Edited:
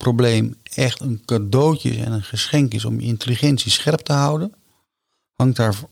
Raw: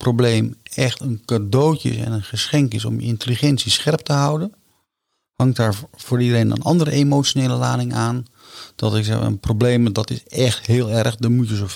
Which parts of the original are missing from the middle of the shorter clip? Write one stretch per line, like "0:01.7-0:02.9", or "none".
none